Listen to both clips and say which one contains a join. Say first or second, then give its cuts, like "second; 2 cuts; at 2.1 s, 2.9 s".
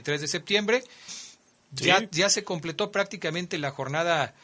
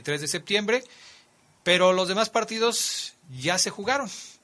first; 1 cut; at 1.1 s